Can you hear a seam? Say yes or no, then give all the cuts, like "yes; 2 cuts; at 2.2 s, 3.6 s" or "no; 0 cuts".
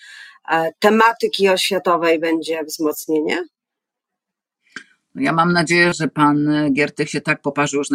no; 0 cuts